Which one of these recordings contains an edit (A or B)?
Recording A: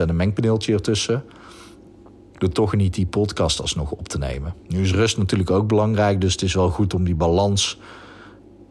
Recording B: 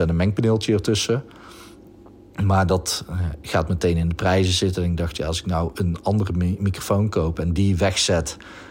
A